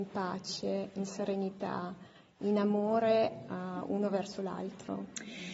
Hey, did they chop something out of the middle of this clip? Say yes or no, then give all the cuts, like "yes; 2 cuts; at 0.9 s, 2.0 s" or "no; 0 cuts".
no; 0 cuts